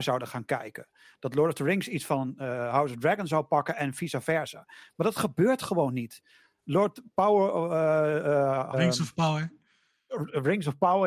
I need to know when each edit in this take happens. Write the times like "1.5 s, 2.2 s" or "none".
8.7 s